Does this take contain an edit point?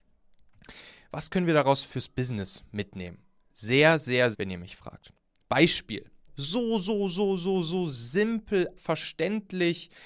yes; 3 cuts; at 4.3 s, 6.3 s, 8.8 s

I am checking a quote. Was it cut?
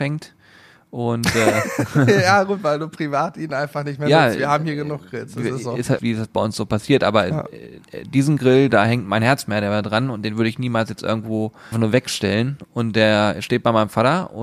yes; 2 cuts; at 6.0 s, 11.7 s

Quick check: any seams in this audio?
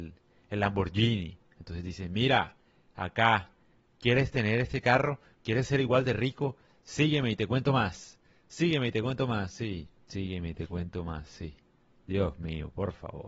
no; 0 cuts

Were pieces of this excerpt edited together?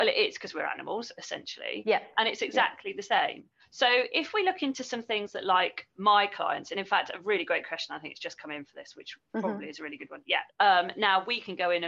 yes; 1 cut; at 10.5 s

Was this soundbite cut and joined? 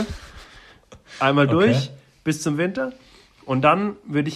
no; 0 cuts

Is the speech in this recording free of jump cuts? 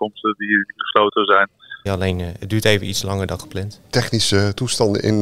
no; 1 cut; at 1.9 s

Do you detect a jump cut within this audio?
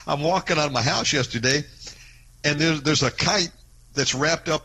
no; 0 cuts

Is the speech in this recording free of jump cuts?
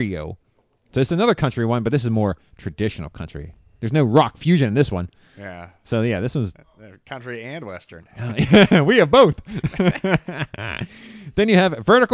yes; 0 cuts

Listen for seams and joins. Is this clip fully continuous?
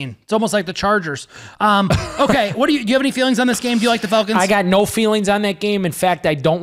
yes; 0 cuts

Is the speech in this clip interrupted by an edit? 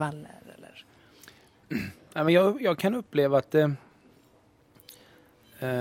no; 0 cuts

